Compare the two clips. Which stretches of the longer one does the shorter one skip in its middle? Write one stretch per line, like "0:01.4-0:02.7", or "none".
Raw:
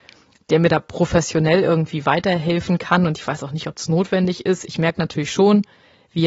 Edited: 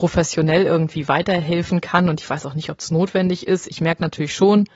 none